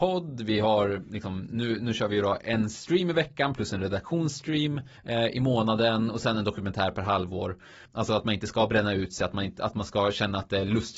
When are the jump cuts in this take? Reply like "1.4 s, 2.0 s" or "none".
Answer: 5.0 s, 7.8 s